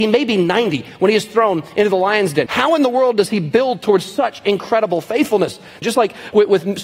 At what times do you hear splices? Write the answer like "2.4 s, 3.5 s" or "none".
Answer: 2.5 s, 5.8 s